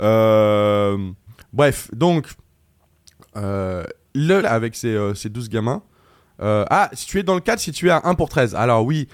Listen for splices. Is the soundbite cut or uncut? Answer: cut